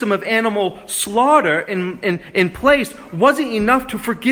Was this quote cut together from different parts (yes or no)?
no